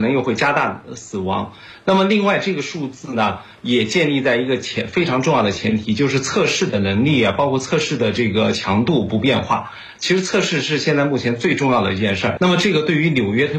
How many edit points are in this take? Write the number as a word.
two